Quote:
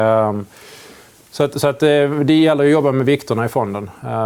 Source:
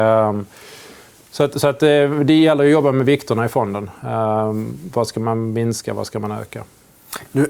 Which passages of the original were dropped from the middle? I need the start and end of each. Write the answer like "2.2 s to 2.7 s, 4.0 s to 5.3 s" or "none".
none